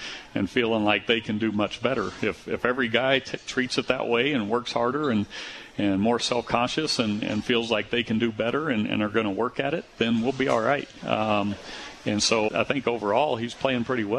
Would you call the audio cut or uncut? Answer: cut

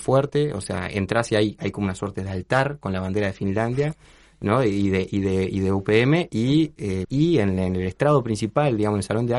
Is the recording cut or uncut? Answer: cut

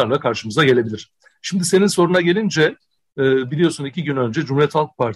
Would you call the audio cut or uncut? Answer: uncut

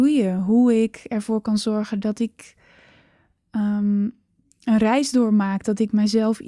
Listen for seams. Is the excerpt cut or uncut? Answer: uncut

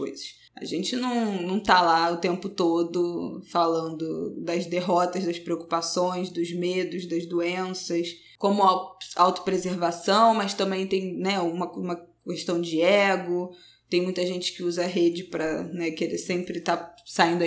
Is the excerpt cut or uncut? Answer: uncut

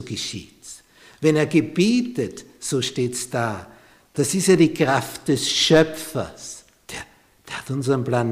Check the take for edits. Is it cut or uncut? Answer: cut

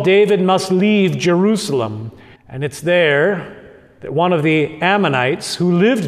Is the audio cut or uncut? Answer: cut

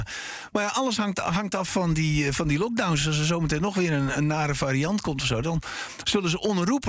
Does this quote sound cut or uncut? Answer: uncut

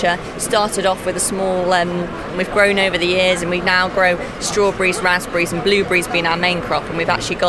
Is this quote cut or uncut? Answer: cut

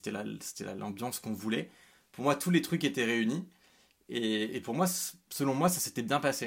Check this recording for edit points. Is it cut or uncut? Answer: uncut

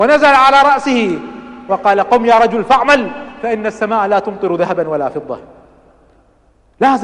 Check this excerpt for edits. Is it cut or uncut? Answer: uncut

